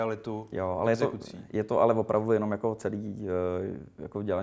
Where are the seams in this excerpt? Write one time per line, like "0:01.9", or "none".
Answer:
none